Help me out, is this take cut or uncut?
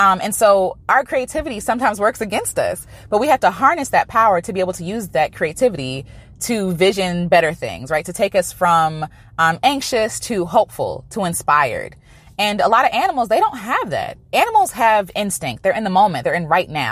uncut